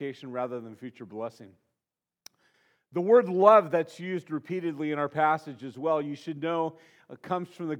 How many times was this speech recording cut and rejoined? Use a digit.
0